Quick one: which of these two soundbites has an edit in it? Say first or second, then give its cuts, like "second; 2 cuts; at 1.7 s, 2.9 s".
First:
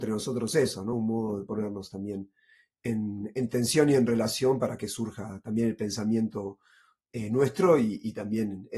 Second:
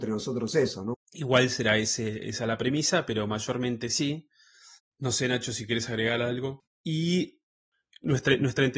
second; 3 cuts; at 0.9 s, 4.8 s, 6.6 s